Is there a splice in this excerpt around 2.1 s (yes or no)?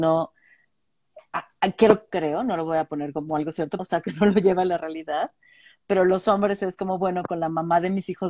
yes